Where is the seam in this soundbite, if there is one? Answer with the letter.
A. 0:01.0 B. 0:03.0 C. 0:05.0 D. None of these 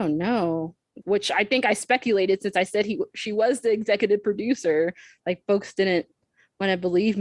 A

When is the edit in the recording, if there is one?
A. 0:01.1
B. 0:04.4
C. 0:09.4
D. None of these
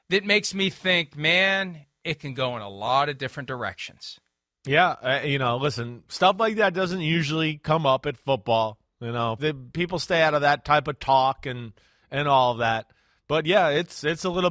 C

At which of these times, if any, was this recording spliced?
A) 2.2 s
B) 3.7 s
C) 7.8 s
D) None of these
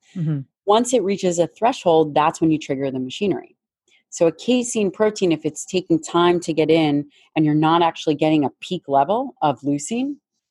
D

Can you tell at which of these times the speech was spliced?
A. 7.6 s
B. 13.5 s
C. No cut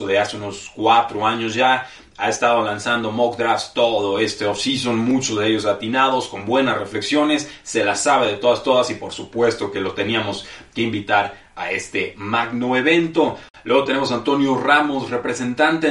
B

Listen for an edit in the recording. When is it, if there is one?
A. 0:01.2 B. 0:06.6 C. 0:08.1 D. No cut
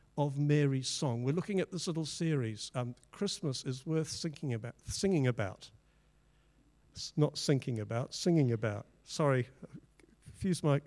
D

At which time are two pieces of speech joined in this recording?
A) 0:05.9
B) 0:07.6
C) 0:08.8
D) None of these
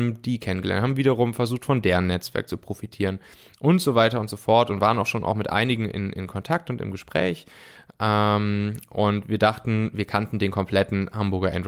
D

